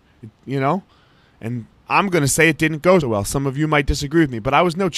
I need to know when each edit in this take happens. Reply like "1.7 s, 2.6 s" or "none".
1.7 s, 3.0 s